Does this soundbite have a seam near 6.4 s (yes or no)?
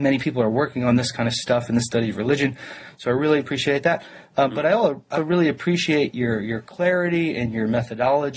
no